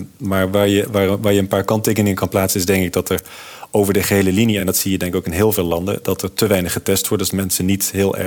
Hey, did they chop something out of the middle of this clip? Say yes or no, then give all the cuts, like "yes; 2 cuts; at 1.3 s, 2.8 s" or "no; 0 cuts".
no; 0 cuts